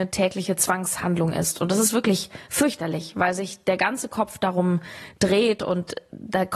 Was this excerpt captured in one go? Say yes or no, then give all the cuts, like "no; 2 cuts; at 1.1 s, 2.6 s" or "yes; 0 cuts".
yes; 0 cuts